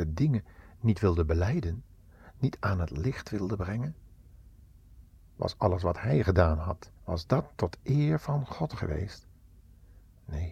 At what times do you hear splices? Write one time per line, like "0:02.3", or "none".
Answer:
0:05.2
0:07.0